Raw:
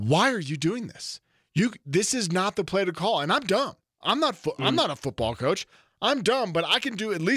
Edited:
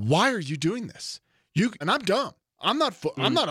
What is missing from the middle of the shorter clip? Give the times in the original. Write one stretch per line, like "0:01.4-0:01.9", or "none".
0:01.8-0:03.2